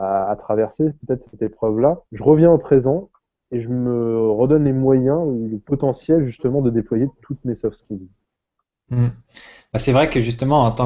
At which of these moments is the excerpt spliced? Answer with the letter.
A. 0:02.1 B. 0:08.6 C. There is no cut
A